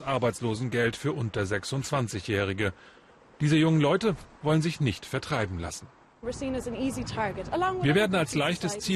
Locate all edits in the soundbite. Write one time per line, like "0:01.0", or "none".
none